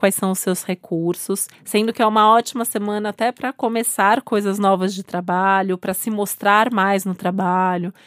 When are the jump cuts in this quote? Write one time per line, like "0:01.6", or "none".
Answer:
0:01.5